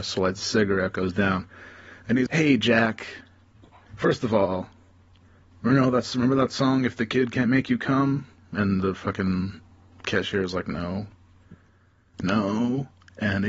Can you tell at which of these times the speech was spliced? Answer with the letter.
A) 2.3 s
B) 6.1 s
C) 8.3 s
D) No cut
A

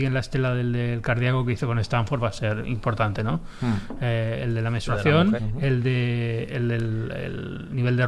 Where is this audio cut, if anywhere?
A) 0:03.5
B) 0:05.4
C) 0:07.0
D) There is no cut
B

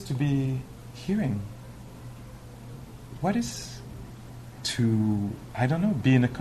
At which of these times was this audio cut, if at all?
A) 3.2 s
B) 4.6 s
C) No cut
B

